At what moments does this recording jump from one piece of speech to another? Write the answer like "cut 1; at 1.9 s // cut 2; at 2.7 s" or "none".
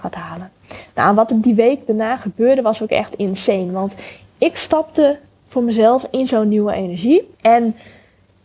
cut 1; at 7.3 s